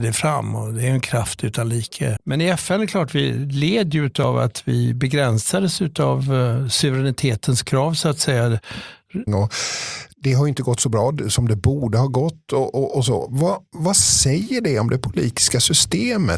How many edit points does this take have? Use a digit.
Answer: 2